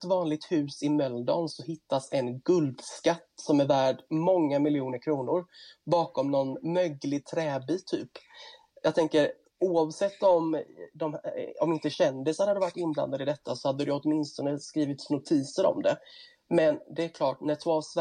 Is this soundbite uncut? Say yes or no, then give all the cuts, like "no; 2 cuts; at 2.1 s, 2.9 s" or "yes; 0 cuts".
yes; 0 cuts